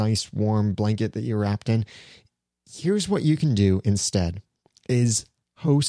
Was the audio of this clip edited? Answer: no; 0 cuts

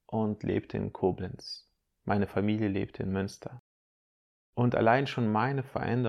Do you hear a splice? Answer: no; 0 cuts

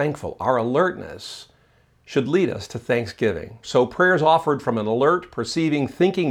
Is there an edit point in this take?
yes; 1 cut; at 3.6 s

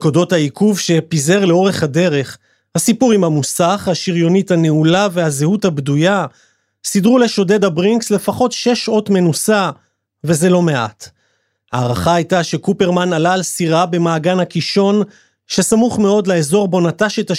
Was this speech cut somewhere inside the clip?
no; 0 cuts

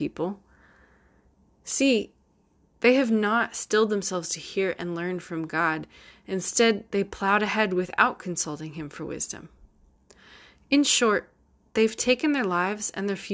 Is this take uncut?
yes; 0 cuts

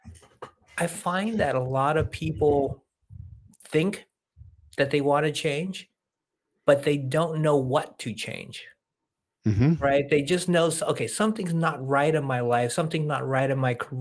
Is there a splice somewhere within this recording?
no; 0 cuts

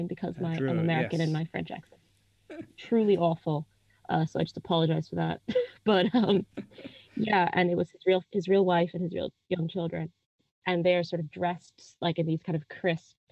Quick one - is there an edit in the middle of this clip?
no; 0 cuts

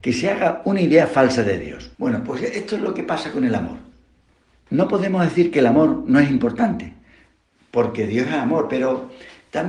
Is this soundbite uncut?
yes; 0 cuts

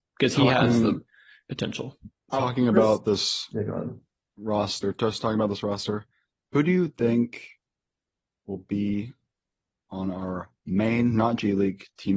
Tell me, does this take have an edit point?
no; 0 cuts

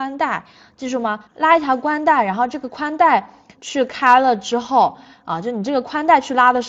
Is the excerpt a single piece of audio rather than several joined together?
no; 1 cut; at 1.3 s

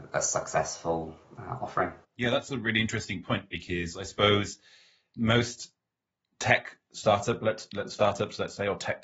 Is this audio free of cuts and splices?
no; 1 cut; at 2.0 s

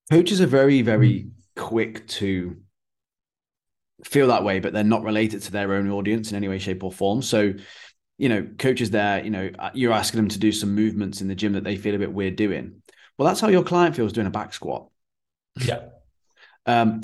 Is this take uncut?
yes; 0 cuts

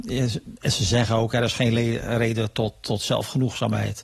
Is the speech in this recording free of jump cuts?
yes; 0 cuts

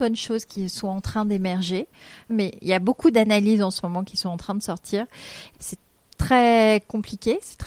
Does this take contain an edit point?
yes; 2 cuts; at 2.3 s, 5.5 s

